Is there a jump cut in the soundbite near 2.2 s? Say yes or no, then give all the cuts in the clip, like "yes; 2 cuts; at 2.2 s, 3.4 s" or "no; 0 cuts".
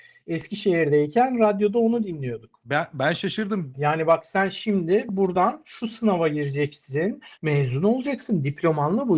no; 2 cuts; at 3.7 s, 7.4 s